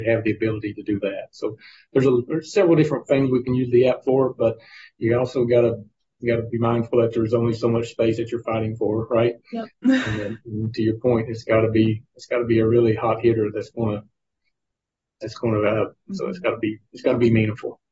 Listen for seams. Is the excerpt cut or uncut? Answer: cut